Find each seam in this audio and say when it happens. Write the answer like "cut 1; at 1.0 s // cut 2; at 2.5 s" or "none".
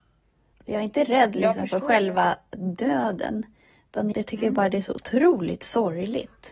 cut 1; at 4.1 s